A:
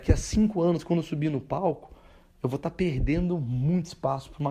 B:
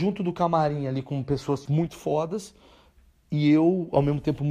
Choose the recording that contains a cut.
B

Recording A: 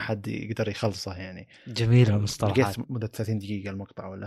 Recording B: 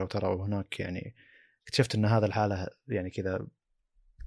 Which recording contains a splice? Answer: A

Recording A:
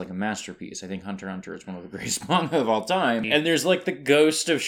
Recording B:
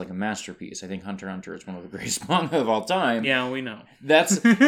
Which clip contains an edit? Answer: A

